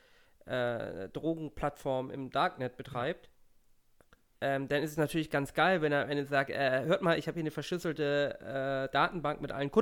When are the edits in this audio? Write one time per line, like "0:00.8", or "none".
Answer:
none